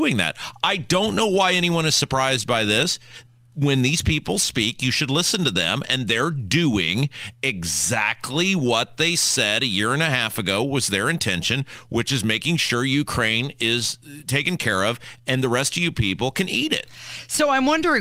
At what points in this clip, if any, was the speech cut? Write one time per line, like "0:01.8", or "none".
none